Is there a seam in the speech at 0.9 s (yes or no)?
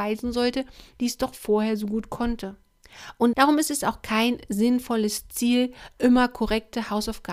yes